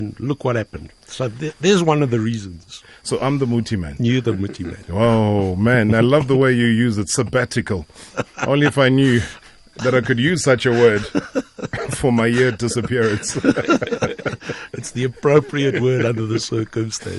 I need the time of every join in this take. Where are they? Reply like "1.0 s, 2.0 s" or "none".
none